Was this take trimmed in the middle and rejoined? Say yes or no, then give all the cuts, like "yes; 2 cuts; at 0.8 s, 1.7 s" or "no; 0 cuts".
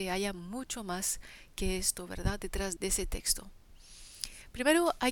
yes; 1 cut; at 2.8 s